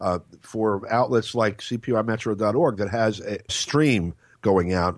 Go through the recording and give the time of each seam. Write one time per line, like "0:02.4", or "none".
0:03.5